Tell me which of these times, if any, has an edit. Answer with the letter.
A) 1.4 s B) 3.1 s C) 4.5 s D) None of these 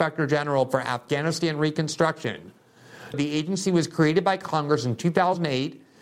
B